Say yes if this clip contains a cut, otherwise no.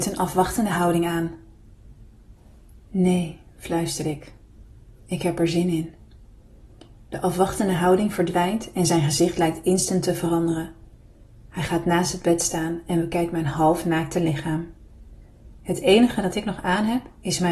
no